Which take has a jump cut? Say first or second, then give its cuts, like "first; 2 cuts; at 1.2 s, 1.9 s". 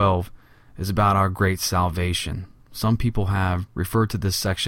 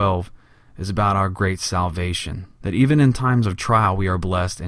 second; 1 cut; at 2.6 s